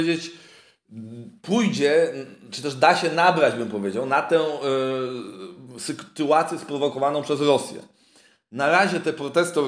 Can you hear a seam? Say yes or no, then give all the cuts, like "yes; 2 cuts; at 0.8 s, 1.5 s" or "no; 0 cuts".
no; 0 cuts